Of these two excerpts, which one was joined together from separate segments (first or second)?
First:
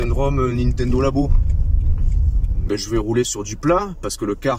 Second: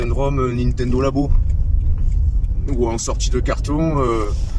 first